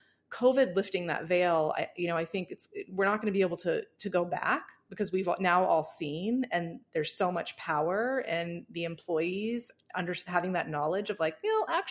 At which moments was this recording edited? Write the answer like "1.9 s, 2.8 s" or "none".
none

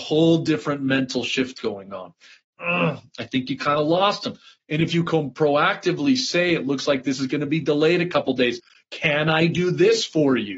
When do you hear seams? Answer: 2.4 s, 4.6 s

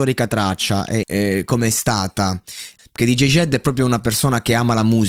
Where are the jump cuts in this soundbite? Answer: 1.0 s, 2.8 s

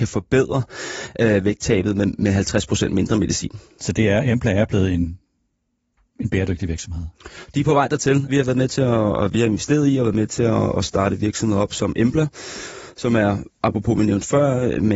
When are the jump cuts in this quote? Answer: 8.3 s

